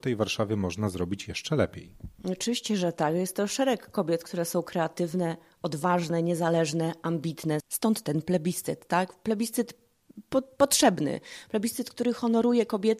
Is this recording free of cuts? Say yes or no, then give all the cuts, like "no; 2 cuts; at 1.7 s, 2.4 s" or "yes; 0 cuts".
no; 1 cut; at 7.6 s